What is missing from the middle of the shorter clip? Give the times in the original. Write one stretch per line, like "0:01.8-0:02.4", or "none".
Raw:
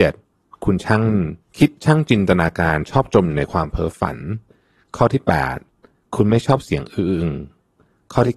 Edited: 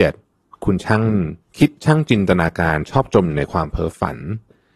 none